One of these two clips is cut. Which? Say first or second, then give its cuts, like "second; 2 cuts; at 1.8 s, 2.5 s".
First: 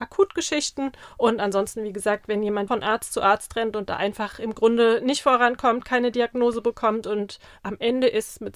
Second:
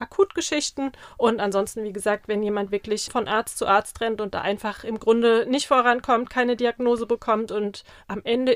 first; 1 cut; at 2.7 s